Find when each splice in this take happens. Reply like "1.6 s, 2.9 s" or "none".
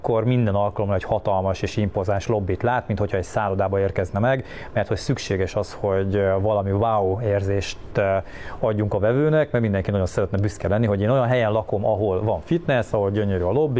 none